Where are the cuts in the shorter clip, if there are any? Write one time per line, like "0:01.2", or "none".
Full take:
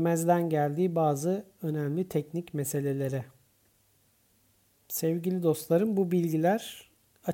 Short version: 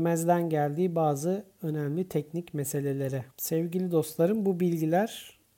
0:03.3